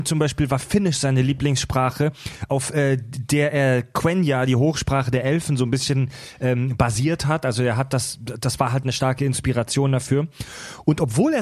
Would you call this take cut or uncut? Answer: uncut